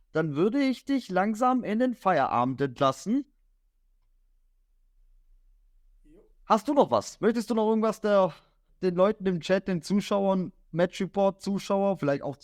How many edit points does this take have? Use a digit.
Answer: 1